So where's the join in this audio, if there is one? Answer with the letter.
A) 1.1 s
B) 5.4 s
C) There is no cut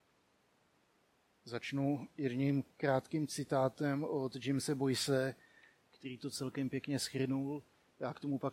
C